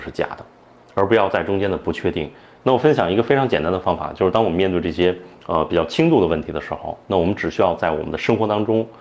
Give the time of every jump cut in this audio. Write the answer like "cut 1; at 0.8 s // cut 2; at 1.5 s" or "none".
cut 1; at 2.6 s